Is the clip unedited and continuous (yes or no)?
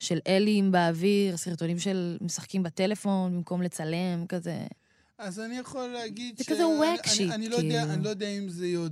yes